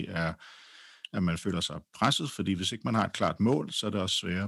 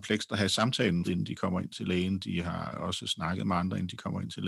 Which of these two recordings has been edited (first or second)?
second